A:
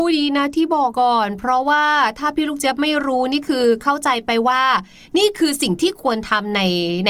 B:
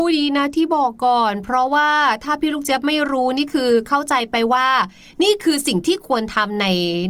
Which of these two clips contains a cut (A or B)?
A